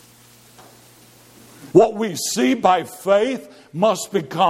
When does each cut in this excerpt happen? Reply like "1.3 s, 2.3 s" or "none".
1.7 s